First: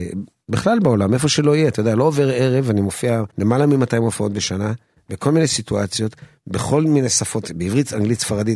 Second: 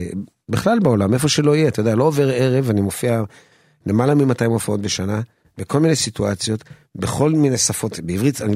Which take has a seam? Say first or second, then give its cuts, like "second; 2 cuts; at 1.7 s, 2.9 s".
first; 1 cut; at 3.3 s